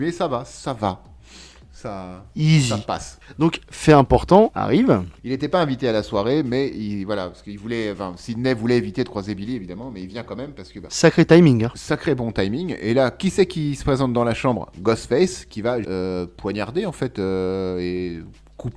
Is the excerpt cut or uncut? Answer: cut